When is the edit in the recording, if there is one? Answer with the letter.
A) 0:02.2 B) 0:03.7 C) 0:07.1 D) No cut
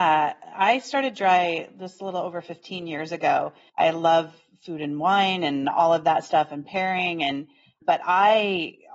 B